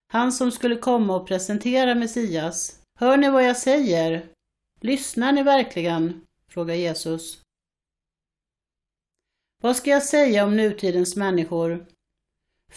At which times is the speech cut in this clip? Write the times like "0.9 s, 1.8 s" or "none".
2.9 s